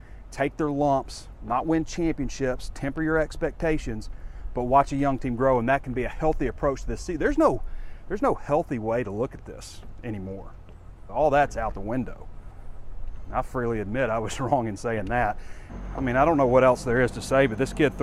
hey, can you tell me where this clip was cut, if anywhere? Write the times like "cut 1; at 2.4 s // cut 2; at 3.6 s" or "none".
none